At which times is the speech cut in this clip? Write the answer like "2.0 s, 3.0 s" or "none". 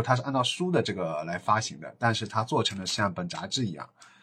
none